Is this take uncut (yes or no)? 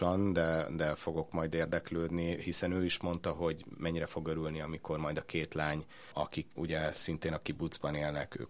no